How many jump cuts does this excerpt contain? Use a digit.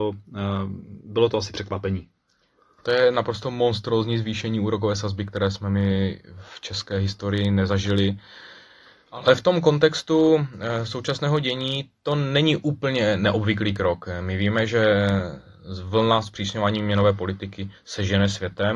0